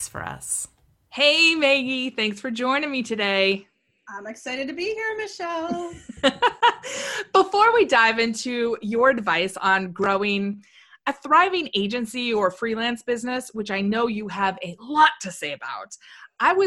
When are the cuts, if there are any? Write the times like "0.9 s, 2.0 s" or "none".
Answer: none